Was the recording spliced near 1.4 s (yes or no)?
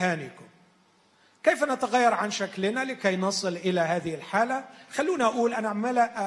no